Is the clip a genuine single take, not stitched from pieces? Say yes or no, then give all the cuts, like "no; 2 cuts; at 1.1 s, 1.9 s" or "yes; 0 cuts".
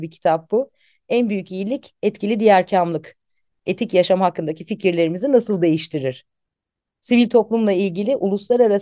yes; 0 cuts